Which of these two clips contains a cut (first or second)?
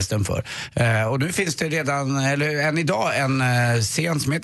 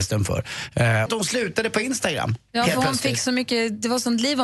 second